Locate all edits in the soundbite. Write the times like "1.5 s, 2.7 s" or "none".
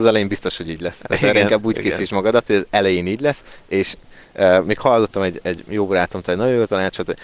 none